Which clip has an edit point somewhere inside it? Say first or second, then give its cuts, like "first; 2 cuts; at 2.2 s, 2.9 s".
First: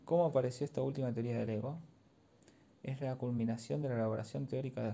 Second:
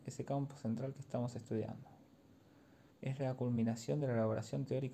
second; 1 cut; at 2.9 s